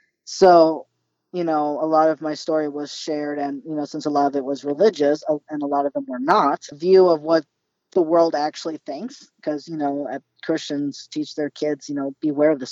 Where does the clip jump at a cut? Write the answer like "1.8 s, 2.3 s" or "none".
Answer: 6.7 s